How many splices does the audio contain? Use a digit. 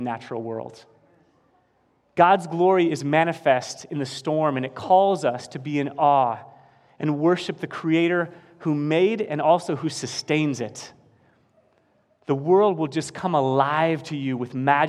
0